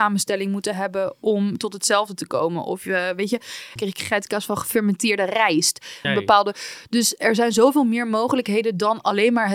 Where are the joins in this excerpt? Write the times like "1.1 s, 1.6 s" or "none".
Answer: 3.8 s, 6.0 s